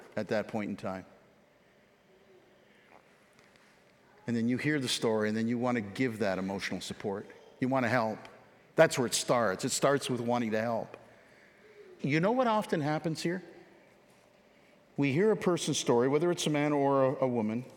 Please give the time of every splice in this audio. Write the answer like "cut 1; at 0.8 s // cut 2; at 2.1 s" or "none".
cut 1; at 12.0 s